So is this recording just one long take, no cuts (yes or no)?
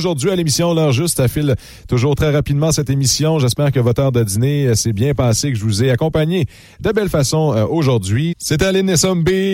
no